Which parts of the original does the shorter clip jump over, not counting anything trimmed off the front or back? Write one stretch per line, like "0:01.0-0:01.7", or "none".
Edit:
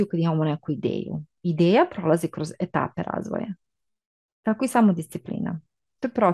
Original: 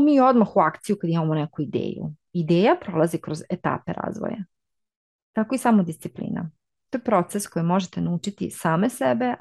none